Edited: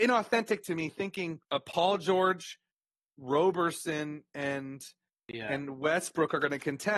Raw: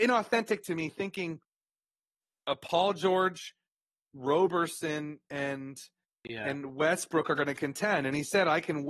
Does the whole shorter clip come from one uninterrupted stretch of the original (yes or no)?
no